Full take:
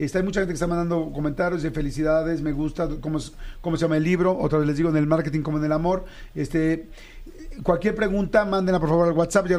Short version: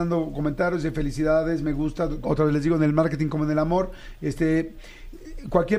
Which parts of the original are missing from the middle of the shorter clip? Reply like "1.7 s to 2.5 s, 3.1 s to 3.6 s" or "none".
3.0 s to 4.4 s